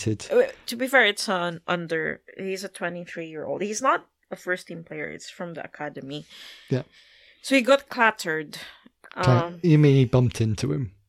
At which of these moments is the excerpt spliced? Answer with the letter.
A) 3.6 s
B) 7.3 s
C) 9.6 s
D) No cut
C